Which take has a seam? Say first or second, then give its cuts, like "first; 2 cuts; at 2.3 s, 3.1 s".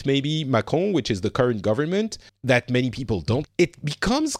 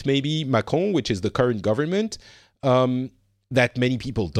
first; 2 cuts; at 2.3 s, 3.4 s